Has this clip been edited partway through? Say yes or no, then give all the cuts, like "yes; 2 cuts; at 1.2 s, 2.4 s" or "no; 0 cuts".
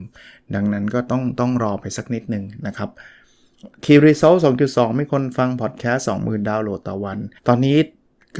yes; 1 cut; at 7.4 s